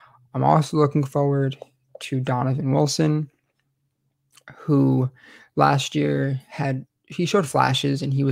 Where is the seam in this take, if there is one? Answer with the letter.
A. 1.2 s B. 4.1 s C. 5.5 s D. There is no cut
D